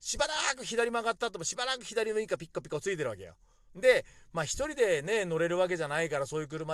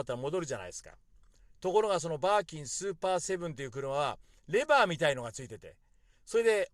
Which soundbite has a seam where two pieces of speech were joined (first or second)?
first